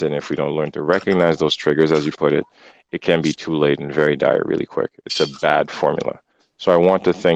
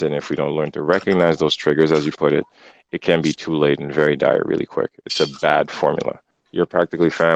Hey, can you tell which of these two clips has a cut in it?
second; 1 cut; at 6.3 s

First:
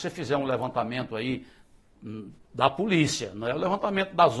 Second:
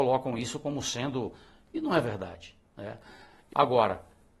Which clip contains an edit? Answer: second; 1 cut; at 3.5 s

